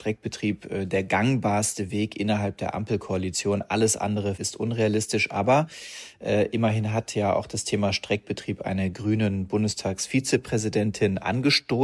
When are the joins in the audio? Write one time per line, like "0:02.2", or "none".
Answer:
0:04.4